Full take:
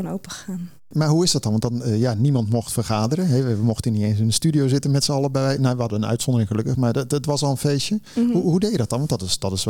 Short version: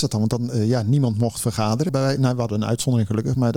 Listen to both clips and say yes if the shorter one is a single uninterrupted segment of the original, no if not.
no